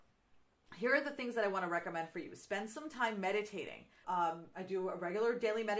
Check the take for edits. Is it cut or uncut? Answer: cut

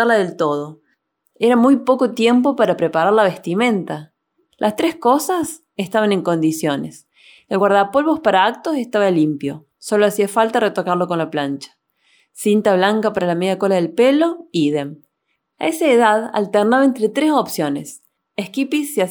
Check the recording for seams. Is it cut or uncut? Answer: cut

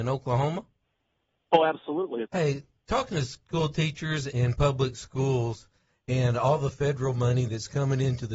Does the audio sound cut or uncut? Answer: cut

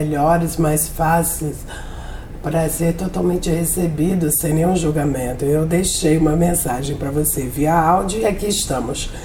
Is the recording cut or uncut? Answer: uncut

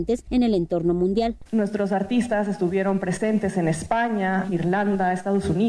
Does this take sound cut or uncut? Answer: cut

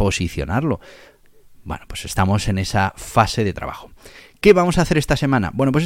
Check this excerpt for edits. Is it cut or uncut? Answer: uncut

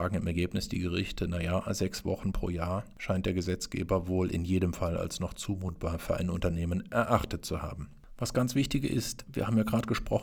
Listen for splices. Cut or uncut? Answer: uncut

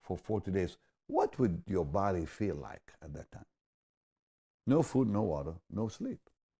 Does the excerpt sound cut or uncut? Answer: uncut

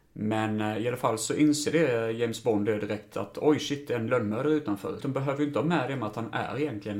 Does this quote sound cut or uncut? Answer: cut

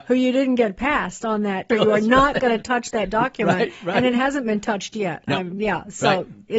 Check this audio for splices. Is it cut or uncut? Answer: cut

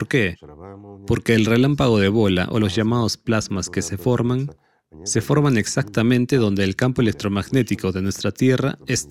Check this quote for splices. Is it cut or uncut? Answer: uncut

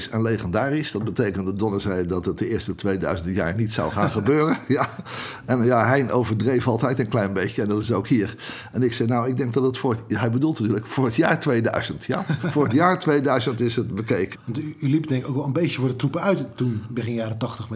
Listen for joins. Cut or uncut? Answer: cut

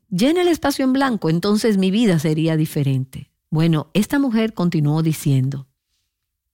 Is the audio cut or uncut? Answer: cut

